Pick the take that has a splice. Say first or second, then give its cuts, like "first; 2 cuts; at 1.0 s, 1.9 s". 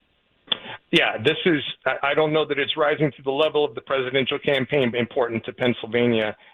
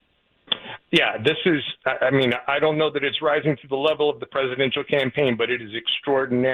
first; 2 cuts; at 2.0 s, 4.9 s